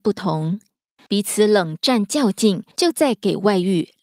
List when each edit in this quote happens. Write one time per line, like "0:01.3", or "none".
0:01.1
0:02.7